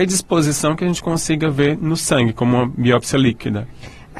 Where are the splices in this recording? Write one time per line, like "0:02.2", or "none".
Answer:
none